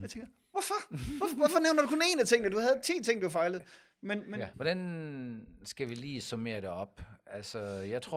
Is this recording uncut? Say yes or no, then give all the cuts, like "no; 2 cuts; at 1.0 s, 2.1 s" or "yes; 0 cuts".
no; 1 cut; at 4.5 s